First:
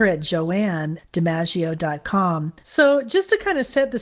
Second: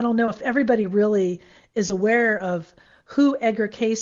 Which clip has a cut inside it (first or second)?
first